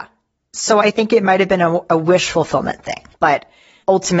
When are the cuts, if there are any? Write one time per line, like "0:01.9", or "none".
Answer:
0:03.1